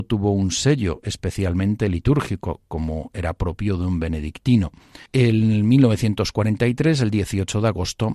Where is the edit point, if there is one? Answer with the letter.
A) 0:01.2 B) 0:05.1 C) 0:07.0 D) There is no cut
B